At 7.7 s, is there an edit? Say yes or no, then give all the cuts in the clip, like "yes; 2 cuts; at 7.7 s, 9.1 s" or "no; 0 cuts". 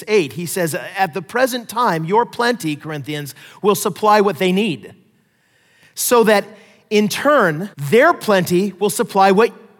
yes; 1 cut; at 7.7 s